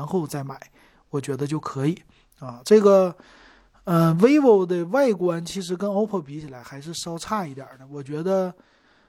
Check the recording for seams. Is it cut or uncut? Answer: uncut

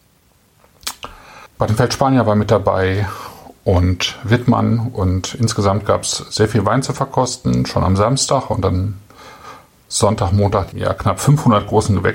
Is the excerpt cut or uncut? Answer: cut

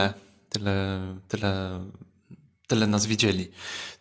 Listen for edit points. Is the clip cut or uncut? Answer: uncut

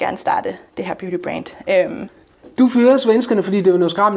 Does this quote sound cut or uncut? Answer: uncut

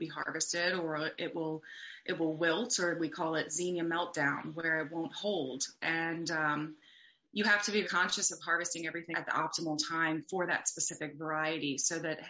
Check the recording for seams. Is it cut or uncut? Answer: cut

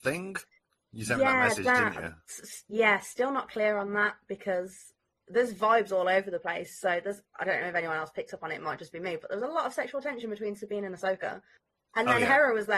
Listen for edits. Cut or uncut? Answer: uncut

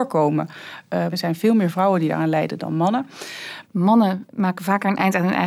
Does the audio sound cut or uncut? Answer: cut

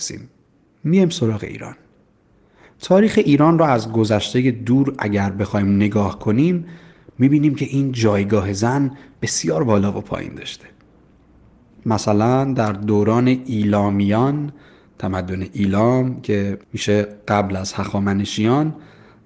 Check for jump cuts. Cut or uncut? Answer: cut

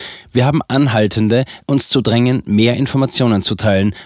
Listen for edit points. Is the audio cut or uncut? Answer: cut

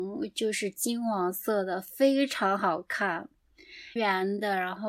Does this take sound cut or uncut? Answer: cut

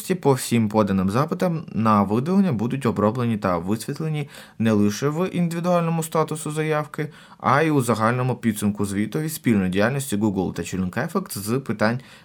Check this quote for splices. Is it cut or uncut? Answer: uncut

